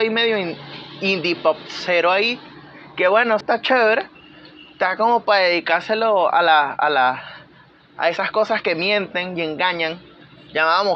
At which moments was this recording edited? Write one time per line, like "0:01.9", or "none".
0:03.4